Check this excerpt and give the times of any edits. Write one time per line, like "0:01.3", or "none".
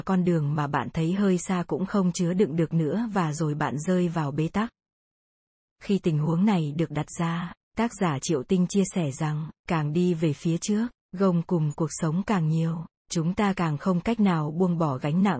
0:09.6